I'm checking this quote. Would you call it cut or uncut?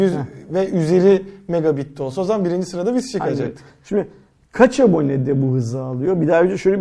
uncut